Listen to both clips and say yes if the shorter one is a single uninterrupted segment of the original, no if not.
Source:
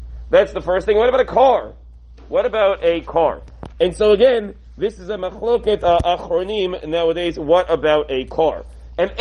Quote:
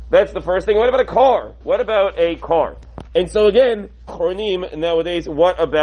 no